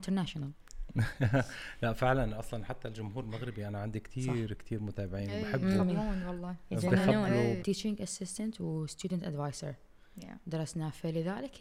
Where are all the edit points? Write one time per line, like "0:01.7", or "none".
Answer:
0:07.6